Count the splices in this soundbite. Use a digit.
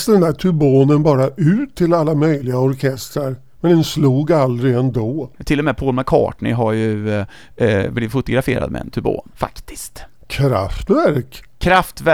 0